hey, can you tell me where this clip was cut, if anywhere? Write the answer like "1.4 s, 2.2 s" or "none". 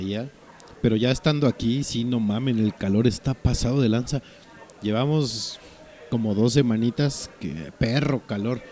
4.7 s